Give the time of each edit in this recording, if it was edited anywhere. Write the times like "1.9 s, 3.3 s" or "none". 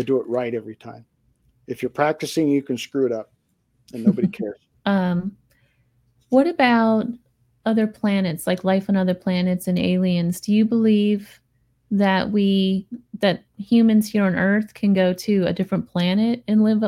4.7 s